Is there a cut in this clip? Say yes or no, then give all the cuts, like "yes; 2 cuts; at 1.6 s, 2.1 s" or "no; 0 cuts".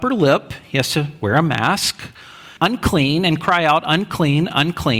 yes; 1 cut; at 2.6 s